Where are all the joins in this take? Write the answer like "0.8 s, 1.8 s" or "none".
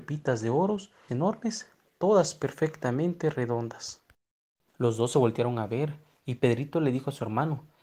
1.1 s, 4.7 s